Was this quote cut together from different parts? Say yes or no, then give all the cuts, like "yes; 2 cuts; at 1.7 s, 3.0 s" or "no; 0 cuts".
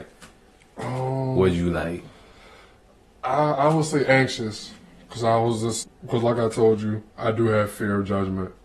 yes; 2 cuts; at 5.8 s, 7.1 s